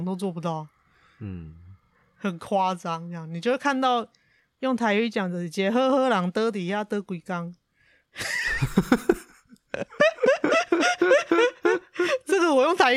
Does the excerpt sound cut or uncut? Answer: uncut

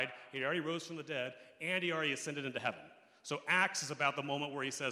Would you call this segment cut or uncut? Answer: uncut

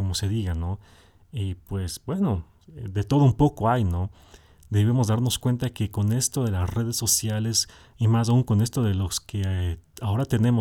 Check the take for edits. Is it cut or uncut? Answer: uncut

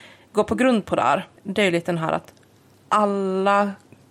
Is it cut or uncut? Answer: cut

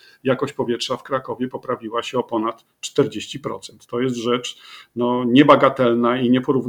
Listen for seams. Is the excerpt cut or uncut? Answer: uncut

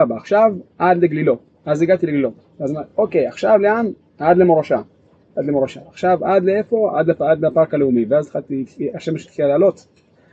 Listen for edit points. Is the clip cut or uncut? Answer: uncut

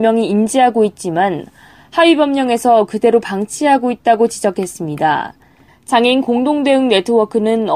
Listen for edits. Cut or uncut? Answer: cut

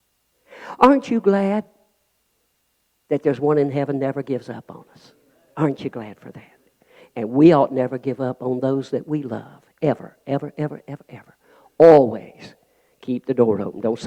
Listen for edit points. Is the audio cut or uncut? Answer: uncut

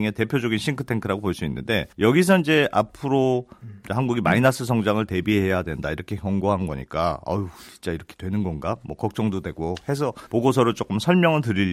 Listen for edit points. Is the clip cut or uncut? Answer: cut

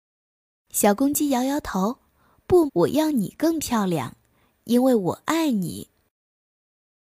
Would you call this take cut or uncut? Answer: cut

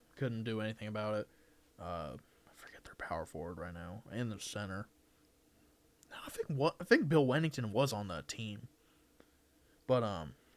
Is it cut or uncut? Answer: cut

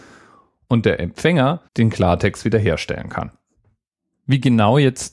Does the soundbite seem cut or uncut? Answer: cut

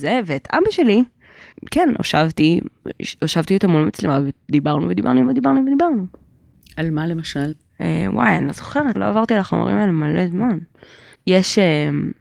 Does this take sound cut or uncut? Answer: cut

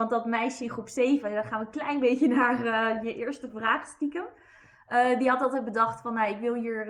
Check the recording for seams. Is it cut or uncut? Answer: uncut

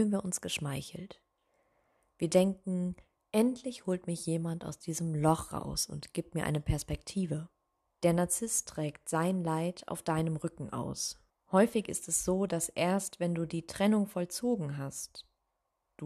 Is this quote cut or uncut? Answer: cut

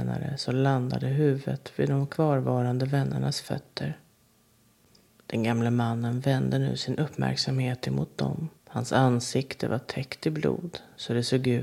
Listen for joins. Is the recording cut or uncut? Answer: cut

